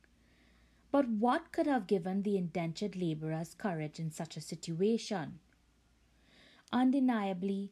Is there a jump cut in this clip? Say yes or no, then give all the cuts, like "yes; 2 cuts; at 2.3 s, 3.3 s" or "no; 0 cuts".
yes; 1 cut; at 6.6 s